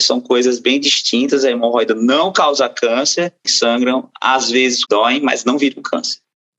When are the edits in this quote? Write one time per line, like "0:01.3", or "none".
0:03.4
0:04.8